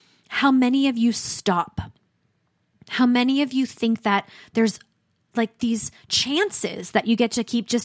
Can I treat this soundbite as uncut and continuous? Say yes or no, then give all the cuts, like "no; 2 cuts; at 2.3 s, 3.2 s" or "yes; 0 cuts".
yes; 0 cuts